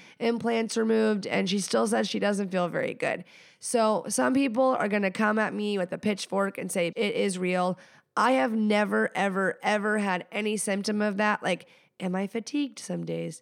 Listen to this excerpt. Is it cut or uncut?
cut